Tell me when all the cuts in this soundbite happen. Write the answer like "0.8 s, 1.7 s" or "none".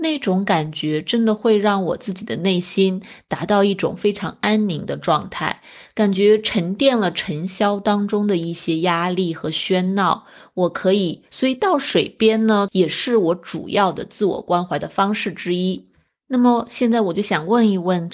11.3 s, 12.7 s